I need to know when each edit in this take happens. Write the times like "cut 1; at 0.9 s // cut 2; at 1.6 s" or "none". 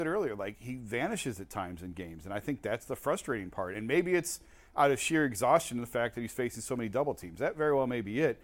none